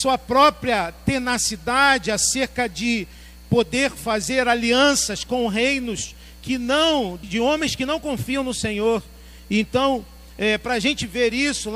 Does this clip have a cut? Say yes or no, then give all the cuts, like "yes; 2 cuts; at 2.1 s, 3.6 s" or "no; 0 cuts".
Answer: yes; 1 cut; at 7.2 s